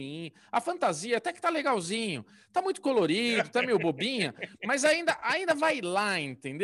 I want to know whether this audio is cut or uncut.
uncut